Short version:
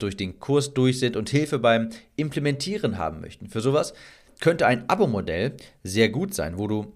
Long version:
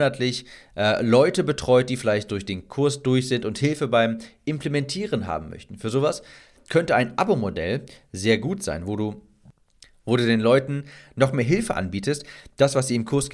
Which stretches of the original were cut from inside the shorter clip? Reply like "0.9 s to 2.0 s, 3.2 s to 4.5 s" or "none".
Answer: none